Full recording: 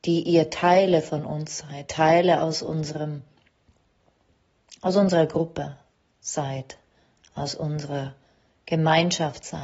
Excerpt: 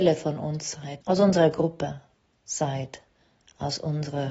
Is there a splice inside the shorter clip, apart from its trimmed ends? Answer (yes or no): yes